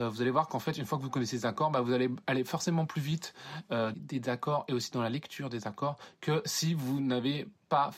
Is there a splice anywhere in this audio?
yes; 1 cut; at 3.9 s

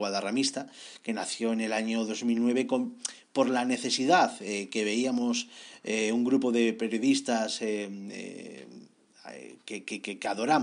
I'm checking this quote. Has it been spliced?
no; 0 cuts

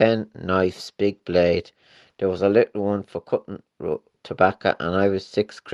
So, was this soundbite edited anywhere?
yes; 1 cut; at 4.1 s

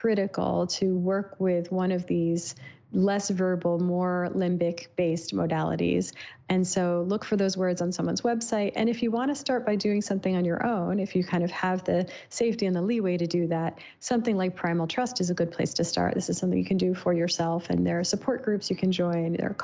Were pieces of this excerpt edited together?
no; 0 cuts

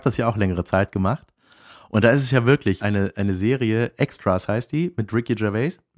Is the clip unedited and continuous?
no; 1 cut; at 2.8 s

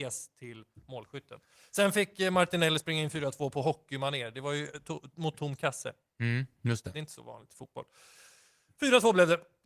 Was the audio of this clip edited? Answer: no; 0 cuts

